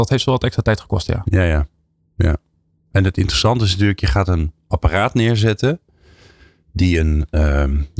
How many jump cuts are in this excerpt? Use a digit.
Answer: 0